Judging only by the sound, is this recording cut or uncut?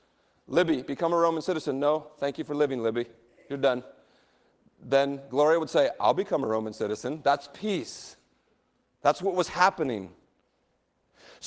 uncut